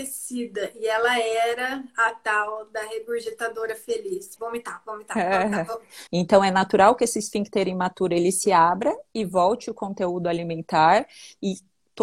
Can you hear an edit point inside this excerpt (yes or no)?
yes